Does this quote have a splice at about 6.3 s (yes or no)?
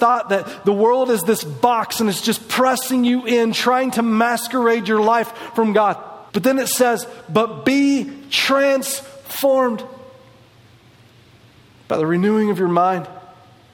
yes